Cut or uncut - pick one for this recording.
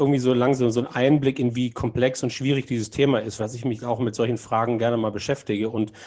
cut